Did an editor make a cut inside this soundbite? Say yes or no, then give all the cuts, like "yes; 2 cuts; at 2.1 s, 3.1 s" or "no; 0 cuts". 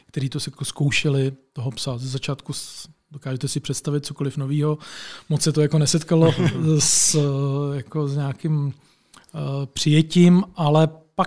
no; 0 cuts